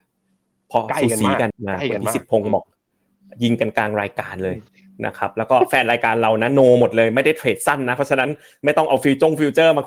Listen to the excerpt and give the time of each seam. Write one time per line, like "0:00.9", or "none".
0:01.5